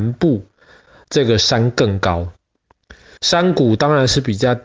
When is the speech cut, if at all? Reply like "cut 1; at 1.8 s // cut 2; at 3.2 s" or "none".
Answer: cut 1; at 3.2 s